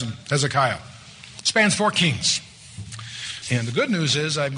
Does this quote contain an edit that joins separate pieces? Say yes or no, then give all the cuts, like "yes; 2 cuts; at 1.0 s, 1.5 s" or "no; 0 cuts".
yes; 2 cuts; at 1.4 s, 3.4 s